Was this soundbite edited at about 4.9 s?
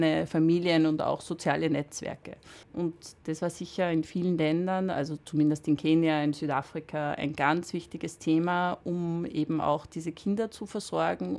no; 1 cut; at 2.6 s

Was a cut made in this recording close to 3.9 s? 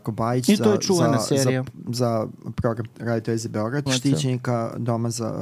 yes; 1 cut; at 3.9 s

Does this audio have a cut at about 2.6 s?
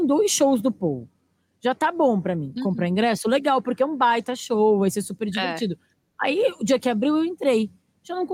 yes; 1 cut; at 2.6 s

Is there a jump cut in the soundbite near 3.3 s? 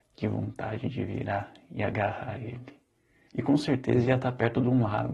yes; 1 cut; at 3.3 s

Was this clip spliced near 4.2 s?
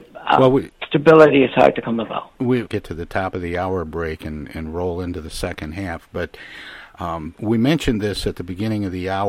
no; 1 cut; at 2.7 s

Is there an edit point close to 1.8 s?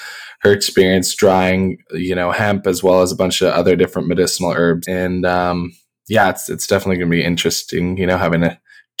no; 1 cut; at 4.8 s

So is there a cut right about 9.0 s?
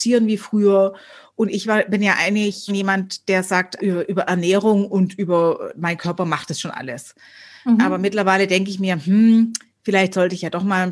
no; 2 cuts; at 2.7 s, 3.8 s

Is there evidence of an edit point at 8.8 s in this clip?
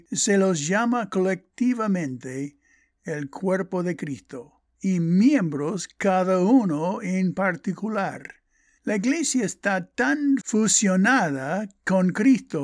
yes; 1 cut; at 8.8 s

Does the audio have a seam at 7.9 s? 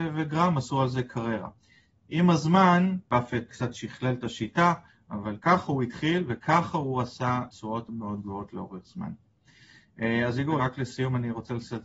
yes; 1 cut; at 7.9 s

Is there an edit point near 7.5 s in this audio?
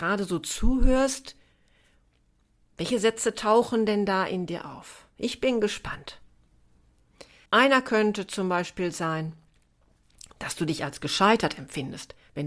yes; 1 cut; at 7.5 s

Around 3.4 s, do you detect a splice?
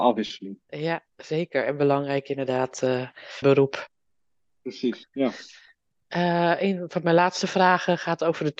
yes; 1 cut; at 3.4 s

